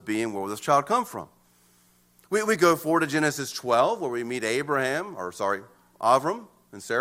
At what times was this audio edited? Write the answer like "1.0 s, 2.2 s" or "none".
none